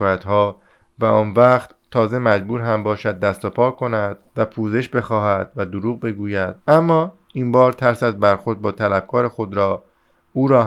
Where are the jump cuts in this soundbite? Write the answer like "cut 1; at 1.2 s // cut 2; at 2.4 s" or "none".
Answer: cut 1; at 4.3 s // cut 2; at 6.6 s